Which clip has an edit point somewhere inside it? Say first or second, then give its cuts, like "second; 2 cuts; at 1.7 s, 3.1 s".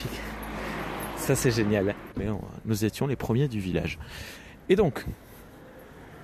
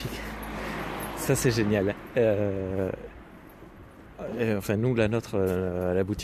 first; 1 cut; at 2.1 s